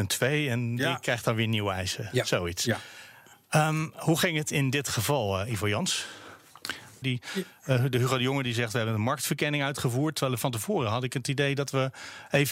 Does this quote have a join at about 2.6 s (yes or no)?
no